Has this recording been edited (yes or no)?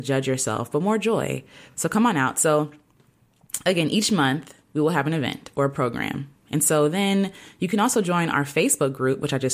no